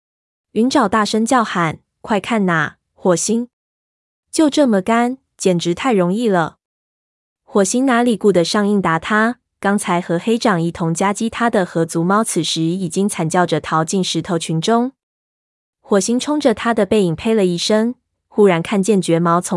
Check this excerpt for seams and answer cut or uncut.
cut